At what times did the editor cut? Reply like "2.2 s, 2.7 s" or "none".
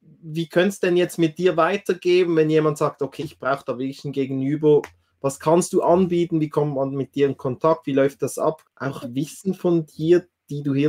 3.2 s, 8.6 s